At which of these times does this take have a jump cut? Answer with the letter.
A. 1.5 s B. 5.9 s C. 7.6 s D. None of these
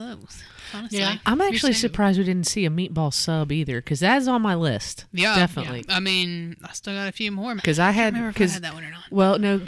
C